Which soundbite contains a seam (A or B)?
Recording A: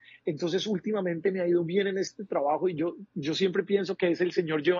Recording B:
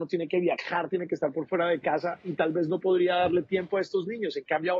A